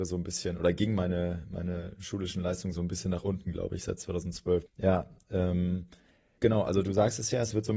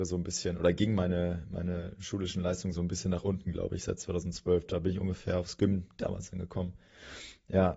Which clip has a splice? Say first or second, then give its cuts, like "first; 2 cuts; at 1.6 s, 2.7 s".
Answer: first; 2 cuts; at 4.7 s, 6.4 s